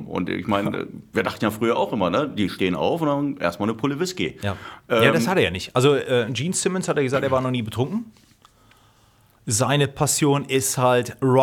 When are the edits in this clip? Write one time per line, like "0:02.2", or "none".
none